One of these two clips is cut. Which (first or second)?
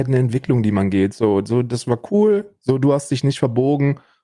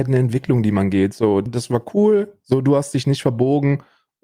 second